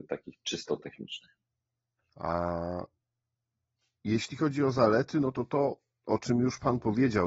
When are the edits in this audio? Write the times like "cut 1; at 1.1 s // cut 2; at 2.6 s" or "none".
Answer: cut 1; at 2.0 s